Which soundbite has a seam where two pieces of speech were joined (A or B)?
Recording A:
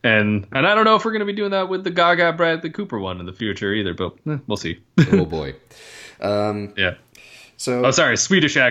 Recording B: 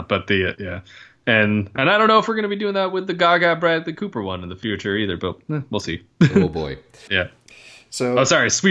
B